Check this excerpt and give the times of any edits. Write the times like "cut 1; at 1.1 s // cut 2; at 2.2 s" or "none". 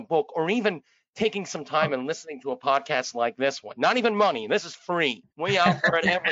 cut 1; at 5.3 s